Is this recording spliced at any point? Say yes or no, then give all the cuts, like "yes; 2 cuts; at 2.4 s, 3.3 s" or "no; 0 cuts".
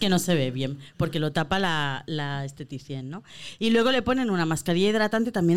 no; 0 cuts